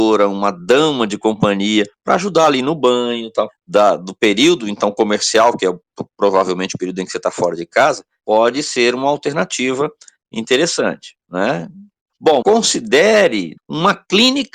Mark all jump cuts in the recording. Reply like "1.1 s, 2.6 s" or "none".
12.4 s, 13.6 s